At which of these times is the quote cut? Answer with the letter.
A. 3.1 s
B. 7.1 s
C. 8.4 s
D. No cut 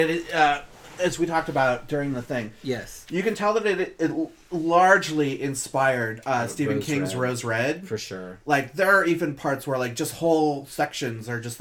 D